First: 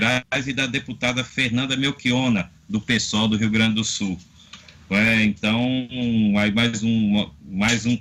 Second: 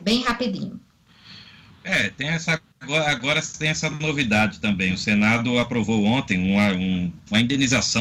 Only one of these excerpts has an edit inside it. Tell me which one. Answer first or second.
second